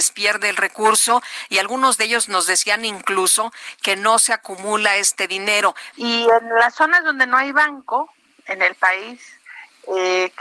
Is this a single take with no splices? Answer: no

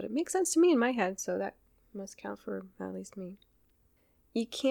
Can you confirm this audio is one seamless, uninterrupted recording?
yes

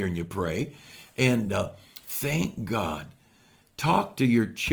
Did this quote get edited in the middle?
no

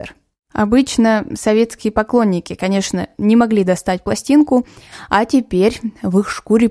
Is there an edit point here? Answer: no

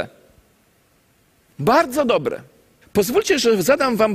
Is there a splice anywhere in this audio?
yes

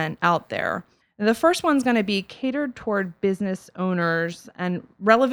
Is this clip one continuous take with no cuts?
no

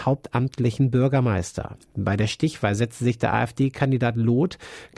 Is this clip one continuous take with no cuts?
yes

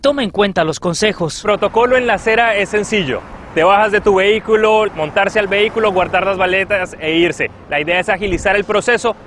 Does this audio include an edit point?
yes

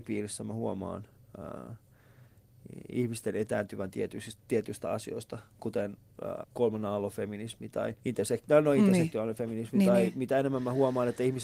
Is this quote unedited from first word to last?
no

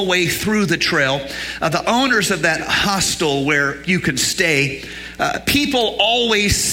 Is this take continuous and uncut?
no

